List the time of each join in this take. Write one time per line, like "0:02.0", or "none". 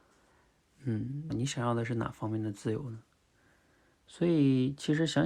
0:01.3